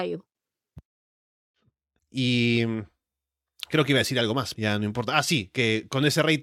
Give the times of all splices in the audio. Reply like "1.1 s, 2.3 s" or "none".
2.0 s, 4.5 s